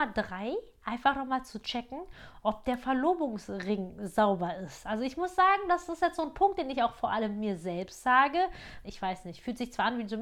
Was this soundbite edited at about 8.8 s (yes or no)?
yes